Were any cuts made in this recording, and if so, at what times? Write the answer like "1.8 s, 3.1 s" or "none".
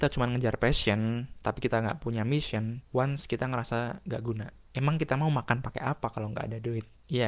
2.9 s, 4.6 s